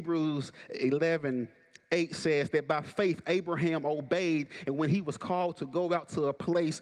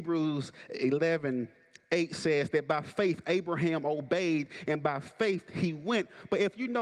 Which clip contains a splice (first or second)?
second